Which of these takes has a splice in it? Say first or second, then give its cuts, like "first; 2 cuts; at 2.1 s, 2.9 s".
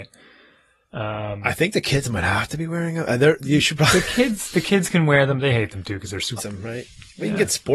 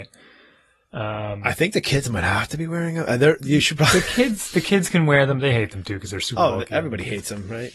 first; 1 cut; at 6.4 s